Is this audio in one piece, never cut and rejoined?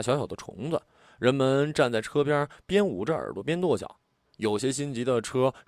yes; 0 cuts

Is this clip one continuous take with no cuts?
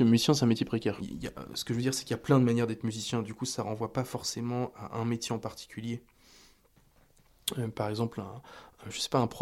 no; 1 cut; at 1.0 s

